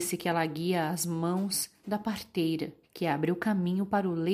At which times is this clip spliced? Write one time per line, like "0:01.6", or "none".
0:02.8